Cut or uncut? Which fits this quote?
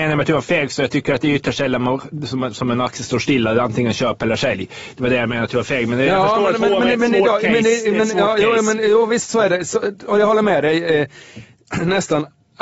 uncut